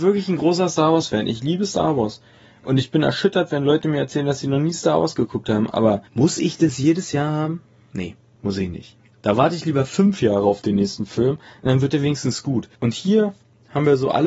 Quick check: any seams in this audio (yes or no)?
yes